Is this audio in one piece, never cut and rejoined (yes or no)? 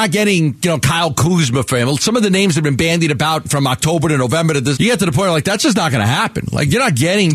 no